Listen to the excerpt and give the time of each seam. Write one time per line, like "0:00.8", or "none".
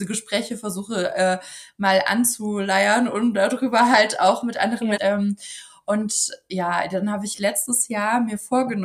0:05.0